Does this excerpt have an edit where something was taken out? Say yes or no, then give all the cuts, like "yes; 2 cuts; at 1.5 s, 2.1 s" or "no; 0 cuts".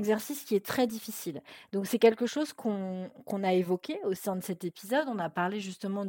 no; 0 cuts